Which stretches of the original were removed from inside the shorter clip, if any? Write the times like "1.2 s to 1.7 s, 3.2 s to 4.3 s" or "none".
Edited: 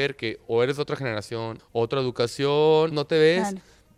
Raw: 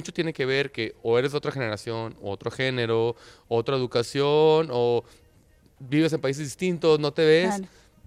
2.1 s to 3.4 s, 4.7 s to 7.0 s